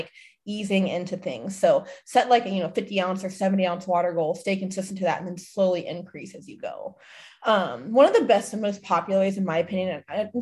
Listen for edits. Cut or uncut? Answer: uncut